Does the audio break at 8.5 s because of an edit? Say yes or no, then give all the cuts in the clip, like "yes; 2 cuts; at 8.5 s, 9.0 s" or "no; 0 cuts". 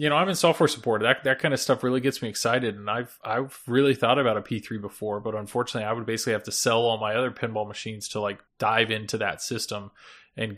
yes; 1 cut; at 8.5 s